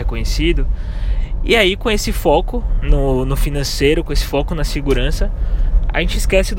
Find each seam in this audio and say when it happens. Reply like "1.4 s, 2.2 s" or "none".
none